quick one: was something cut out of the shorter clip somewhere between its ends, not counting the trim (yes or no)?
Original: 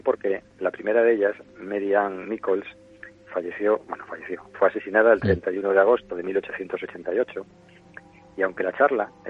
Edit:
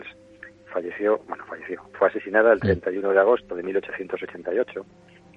no